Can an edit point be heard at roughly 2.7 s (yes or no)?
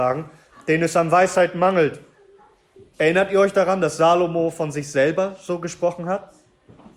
no